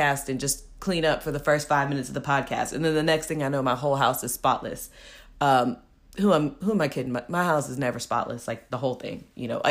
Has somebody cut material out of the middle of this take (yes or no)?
no